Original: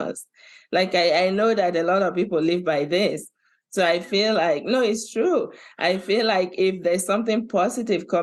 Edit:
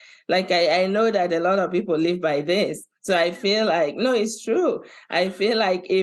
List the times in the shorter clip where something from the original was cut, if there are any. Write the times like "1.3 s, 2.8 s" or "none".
3.0 s